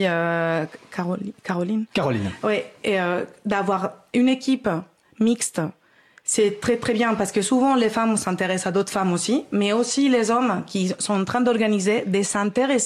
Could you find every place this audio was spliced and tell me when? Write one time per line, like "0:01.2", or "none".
none